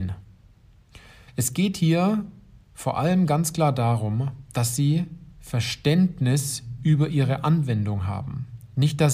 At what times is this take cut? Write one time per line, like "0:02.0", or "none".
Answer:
0:01.3
0:05.3